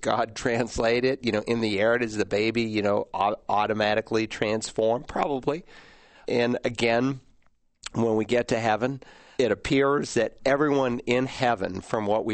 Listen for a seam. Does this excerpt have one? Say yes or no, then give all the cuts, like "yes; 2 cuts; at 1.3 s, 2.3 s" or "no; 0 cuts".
yes; 2 cuts; at 6.2 s, 9.4 s